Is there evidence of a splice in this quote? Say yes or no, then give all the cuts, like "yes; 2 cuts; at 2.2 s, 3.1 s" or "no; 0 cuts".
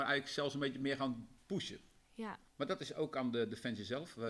yes; 1 cut; at 2.5 s